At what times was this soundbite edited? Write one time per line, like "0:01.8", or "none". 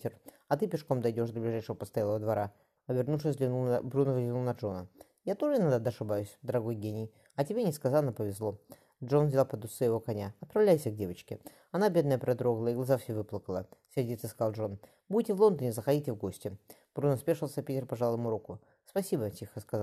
0:02.8